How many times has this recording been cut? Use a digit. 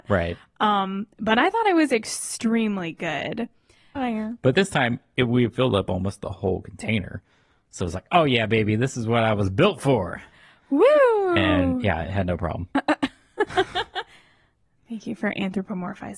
1